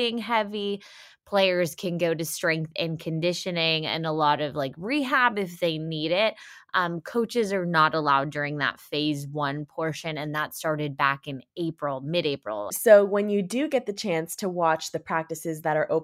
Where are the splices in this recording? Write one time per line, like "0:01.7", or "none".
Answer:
0:12.7